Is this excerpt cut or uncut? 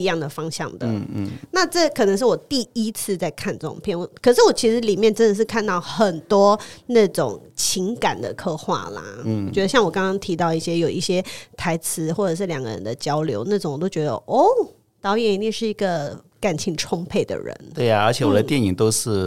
uncut